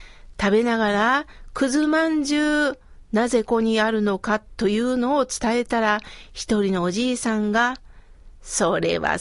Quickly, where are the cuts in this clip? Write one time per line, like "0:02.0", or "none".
0:03.4